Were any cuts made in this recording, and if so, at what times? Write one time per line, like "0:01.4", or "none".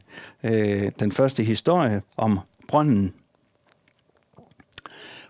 0:02.1

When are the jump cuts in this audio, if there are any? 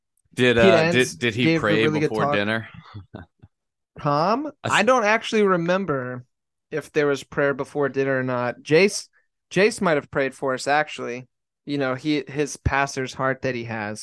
none

